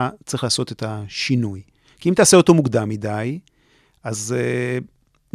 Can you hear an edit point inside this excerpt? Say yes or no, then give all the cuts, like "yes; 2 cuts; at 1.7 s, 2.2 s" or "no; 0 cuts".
no; 0 cuts